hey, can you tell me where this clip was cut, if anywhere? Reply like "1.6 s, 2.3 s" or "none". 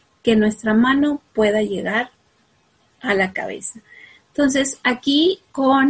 none